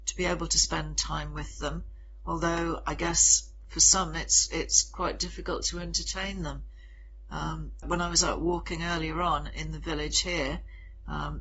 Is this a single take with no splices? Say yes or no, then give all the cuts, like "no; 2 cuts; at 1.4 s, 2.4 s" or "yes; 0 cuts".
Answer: no; 1 cut; at 7.8 s